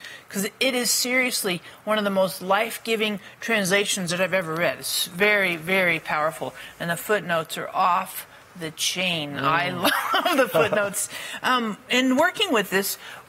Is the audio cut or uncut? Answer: uncut